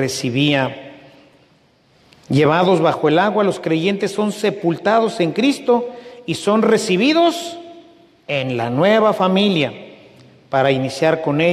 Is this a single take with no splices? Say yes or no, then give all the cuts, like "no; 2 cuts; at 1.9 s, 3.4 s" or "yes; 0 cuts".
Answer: yes; 0 cuts